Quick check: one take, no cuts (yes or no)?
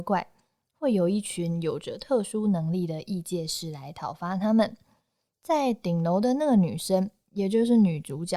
yes